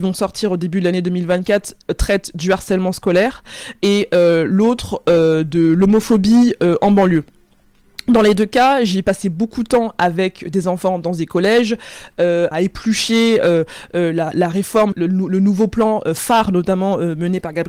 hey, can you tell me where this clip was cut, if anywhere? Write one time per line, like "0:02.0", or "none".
0:12.5
0:14.9